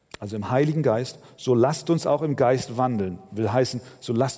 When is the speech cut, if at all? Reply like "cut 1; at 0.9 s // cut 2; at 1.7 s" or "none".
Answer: none